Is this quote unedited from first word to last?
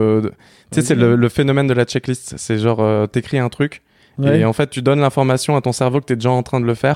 yes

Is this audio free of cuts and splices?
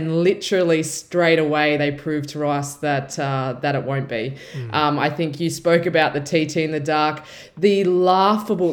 yes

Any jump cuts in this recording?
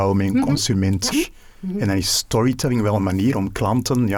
yes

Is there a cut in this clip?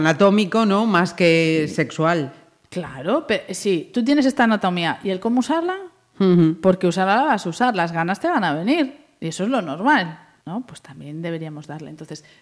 no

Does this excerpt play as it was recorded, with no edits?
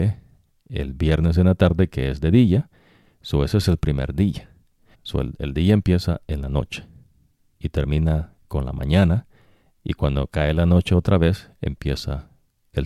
no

